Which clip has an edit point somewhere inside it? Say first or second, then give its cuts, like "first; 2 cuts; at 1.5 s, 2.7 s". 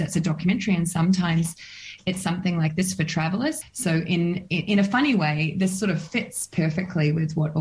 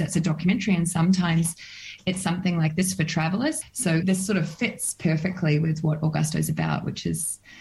second; 1 cut; at 4.0 s